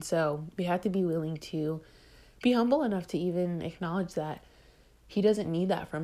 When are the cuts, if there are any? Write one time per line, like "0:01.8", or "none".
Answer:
none